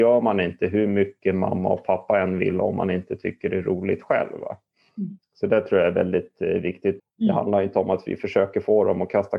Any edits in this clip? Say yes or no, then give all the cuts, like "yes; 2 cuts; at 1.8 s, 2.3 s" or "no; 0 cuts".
yes; 1 cut; at 7.0 s